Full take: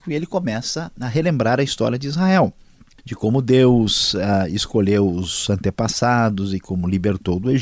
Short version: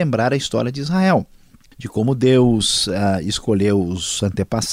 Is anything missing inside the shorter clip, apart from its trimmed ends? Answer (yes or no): no